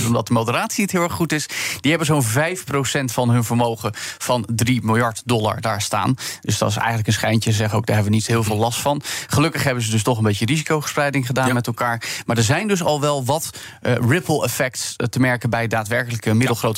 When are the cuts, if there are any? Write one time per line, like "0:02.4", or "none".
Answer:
none